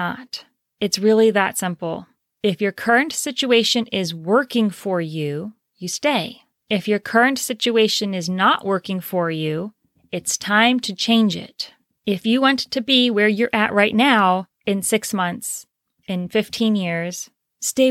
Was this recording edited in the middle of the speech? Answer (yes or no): no